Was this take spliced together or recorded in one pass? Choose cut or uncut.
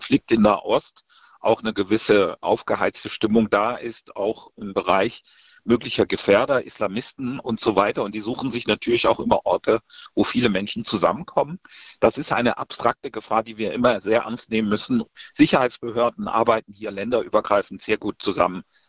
uncut